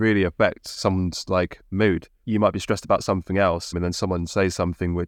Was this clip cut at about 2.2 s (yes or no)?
yes